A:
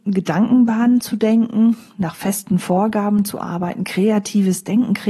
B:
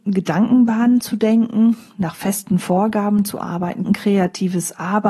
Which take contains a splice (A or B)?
B